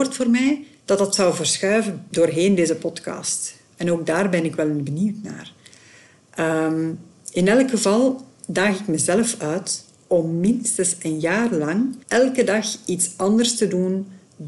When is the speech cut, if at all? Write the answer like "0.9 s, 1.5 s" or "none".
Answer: 12.0 s